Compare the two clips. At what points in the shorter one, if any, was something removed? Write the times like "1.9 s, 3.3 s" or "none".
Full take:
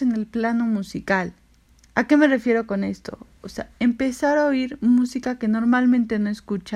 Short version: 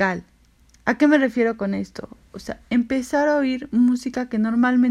none